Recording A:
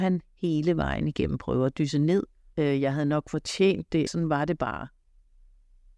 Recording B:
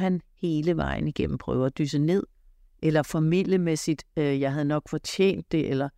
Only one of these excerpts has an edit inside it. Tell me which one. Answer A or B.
A